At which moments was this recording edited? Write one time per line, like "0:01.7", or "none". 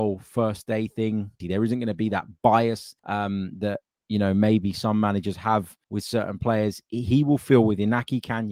0:01.4
0:03.0
0:05.8